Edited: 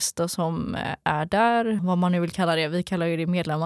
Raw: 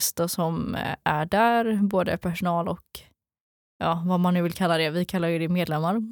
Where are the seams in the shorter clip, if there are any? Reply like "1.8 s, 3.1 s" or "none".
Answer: 1.8 s